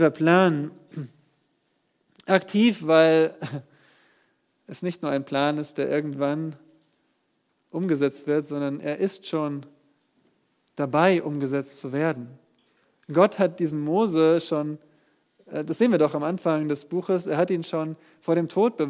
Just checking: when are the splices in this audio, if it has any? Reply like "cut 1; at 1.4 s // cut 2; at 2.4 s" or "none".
none

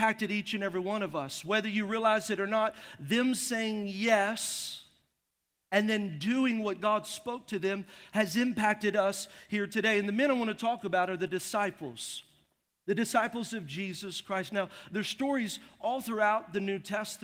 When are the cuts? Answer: none

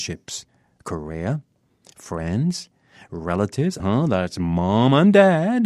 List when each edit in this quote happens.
cut 1; at 3.8 s

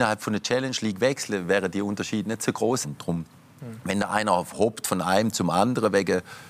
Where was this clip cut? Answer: cut 1; at 2.8 s

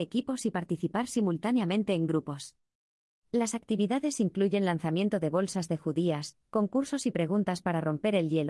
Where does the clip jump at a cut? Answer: cut 1; at 6.4 s

